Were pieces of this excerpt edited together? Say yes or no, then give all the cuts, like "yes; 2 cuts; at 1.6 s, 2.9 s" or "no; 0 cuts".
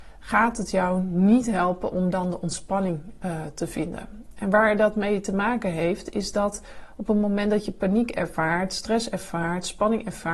no; 0 cuts